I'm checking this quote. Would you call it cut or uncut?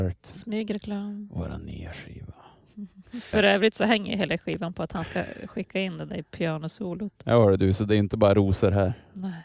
cut